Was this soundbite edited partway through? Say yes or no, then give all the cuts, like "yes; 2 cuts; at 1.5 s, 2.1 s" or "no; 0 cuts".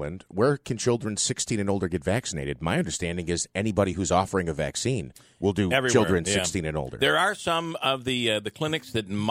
no; 0 cuts